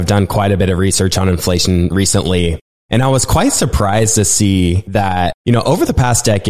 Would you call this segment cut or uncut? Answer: uncut